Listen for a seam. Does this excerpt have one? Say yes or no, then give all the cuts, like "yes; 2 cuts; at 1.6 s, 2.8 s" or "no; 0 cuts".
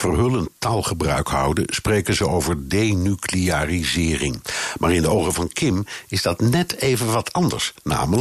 no; 0 cuts